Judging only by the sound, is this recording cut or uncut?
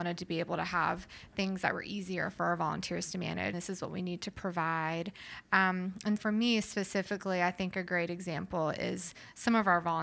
cut